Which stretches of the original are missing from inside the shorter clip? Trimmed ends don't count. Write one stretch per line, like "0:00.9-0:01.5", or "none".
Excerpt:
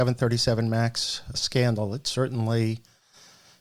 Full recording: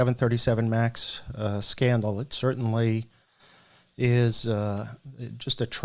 0:01.3-0:01.6